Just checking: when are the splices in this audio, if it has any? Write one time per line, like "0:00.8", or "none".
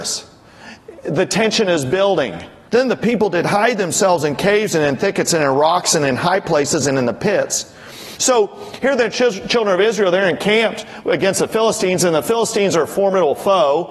0:02.7
0:08.2